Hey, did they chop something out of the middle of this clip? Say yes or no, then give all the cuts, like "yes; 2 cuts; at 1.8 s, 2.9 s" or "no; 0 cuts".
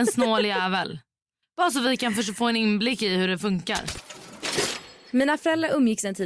no; 0 cuts